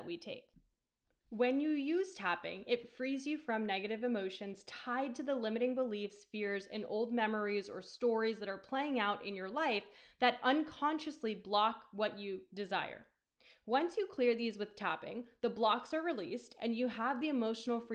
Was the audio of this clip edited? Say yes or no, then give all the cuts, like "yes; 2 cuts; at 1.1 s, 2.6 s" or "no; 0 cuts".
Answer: no; 0 cuts